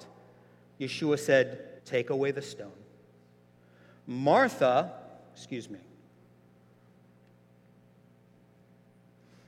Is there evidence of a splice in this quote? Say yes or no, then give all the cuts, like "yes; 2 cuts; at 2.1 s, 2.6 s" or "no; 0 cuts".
yes; 1 cut; at 1.8 s